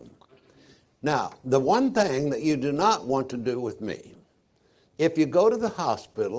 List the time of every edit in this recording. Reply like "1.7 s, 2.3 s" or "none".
none